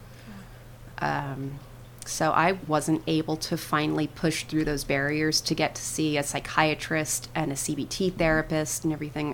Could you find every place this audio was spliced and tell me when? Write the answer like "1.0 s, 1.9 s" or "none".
0.9 s, 2.6 s